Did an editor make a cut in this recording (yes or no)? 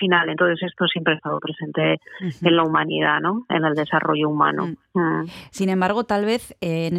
yes